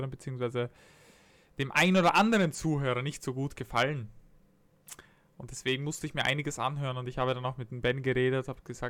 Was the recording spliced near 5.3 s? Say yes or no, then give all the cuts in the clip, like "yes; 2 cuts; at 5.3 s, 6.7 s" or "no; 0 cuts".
no; 0 cuts